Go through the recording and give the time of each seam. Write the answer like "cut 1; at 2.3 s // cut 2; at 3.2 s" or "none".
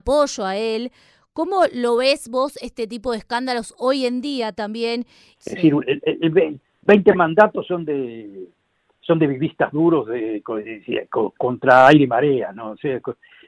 cut 1; at 5.4 s